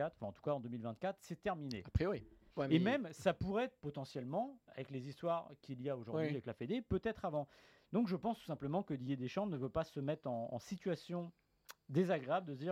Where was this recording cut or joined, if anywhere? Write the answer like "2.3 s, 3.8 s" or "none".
2.5 s

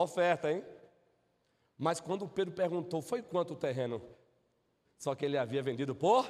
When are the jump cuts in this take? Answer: 4.8 s

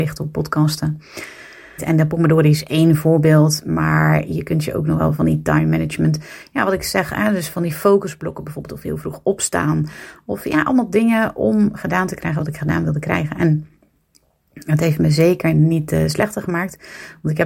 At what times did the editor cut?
1.8 s

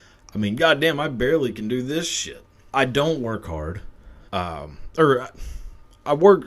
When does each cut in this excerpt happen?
2.7 s, 4.3 s

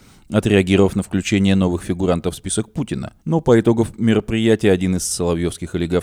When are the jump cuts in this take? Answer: 3.2 s

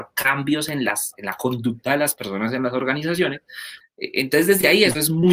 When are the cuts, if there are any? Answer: 3.8 s

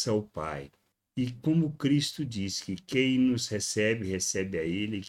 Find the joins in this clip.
none

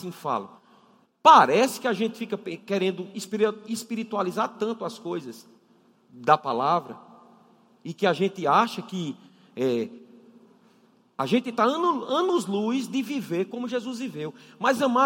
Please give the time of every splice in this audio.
1.0 s

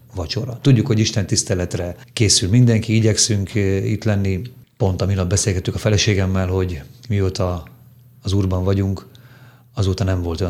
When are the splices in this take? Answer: none

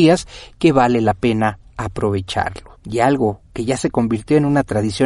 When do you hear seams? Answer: 2.8 s

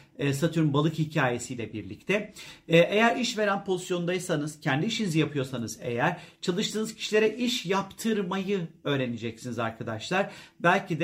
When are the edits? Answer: none

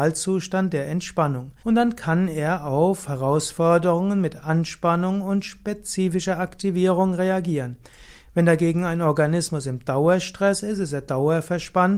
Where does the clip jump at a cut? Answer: 1.6 s

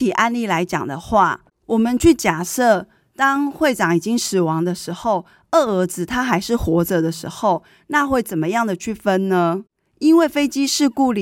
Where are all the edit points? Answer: none

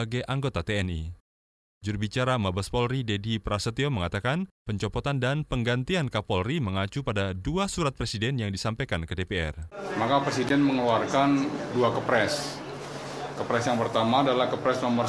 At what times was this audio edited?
1.8 s

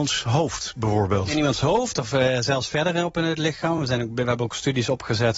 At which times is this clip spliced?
none

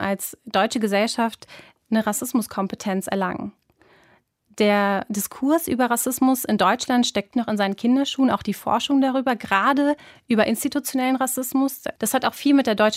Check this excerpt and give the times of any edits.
7.3 s, 12.0 s

